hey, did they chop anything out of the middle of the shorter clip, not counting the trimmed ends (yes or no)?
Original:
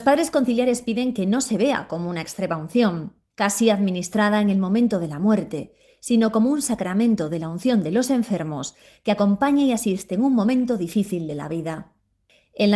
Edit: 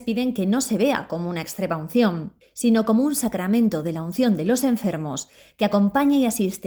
yes